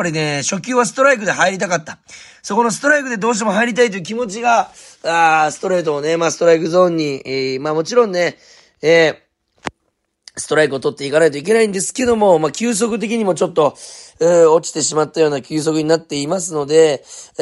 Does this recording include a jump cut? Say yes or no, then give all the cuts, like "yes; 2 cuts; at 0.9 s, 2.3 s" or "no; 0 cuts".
no; 0 cuts